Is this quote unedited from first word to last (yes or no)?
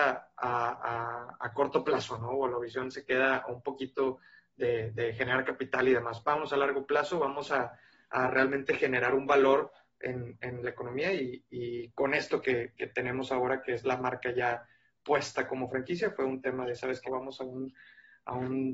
no